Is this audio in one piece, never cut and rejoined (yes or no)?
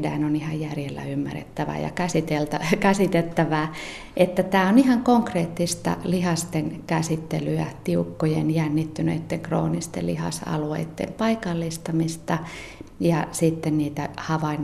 yes